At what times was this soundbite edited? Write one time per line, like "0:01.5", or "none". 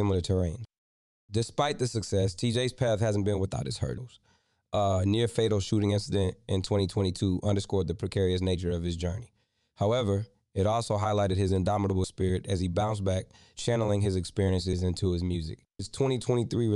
none

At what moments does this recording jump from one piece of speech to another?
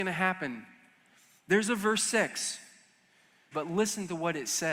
0:03.5

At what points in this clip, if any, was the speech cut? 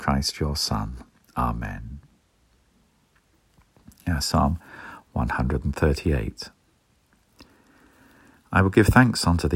0:04.2

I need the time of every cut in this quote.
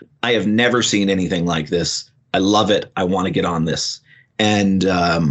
none

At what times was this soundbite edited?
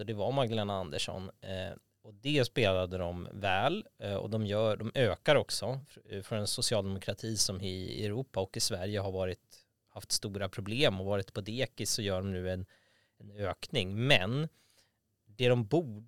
none

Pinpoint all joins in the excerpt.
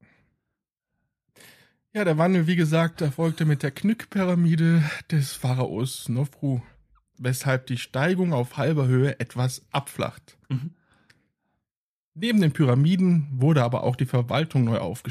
0:07.1
0:10.4

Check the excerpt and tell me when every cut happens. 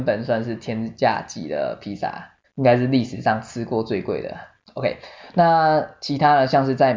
0:02.4

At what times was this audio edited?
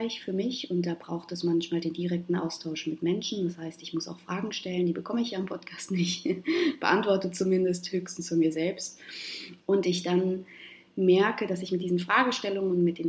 0:09.6

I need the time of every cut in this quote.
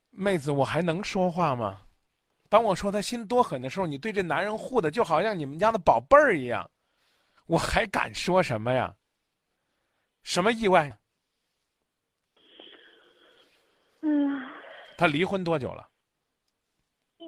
0:07.4
0:10.9

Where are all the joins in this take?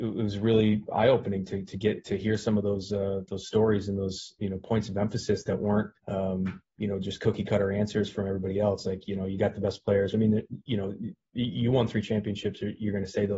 0:06.0
0:10.1

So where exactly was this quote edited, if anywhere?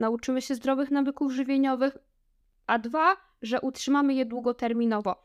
none

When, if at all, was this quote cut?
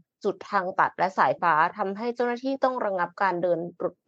0:01.4

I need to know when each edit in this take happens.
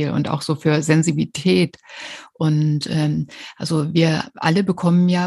none

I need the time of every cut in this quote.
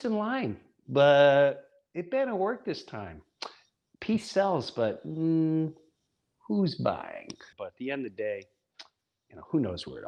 0:07.5

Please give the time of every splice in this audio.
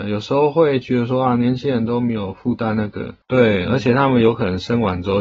0:03.2

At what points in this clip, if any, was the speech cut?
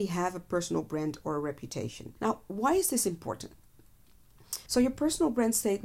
0:02.2
0:04.7

